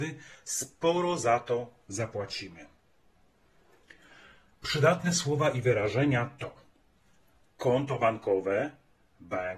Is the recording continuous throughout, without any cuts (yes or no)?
yes